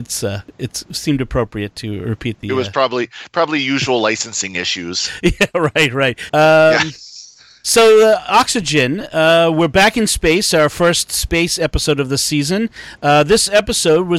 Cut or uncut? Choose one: cut